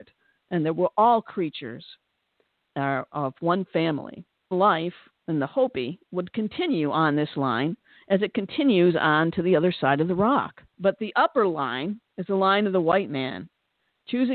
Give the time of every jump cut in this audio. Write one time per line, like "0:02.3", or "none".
0:04.5
0:10.7